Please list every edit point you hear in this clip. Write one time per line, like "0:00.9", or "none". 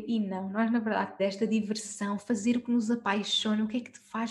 0:01.2